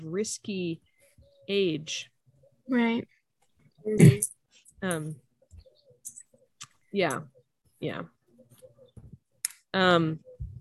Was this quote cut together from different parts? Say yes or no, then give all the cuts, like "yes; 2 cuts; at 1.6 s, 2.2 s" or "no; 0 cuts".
no; 0 cuts